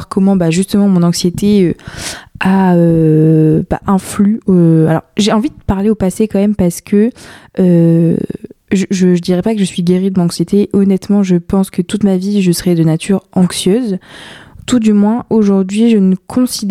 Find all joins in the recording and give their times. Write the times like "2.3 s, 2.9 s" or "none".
none